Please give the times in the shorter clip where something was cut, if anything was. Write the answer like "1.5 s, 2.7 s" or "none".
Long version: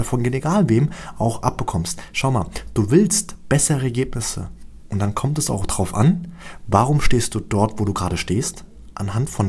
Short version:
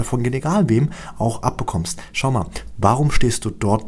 2.7 s